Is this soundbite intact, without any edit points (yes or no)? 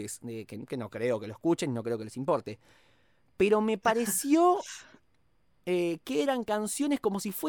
yes